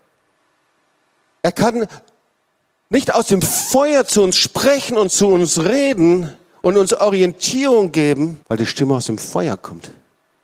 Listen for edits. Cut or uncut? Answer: cut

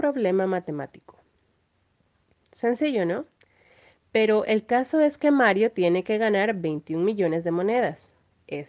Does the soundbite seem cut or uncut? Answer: uncut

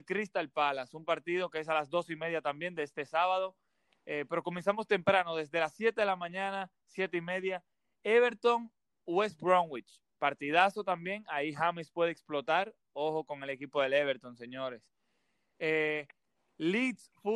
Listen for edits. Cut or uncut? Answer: uncut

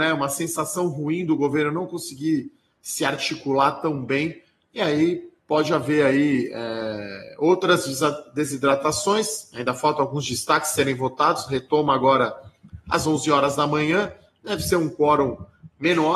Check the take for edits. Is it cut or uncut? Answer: uncut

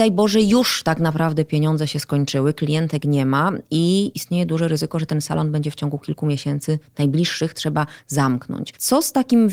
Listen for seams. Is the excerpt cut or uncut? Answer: uncut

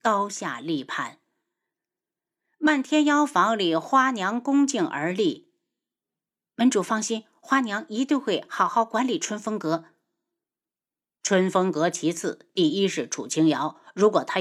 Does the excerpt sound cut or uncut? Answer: uncut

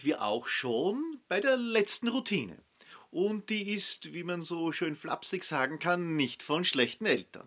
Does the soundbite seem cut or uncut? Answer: uncut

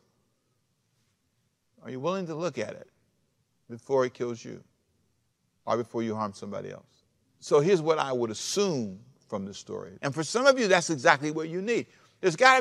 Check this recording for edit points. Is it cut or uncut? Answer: cut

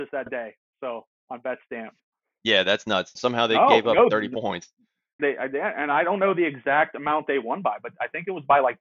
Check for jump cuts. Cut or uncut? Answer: cut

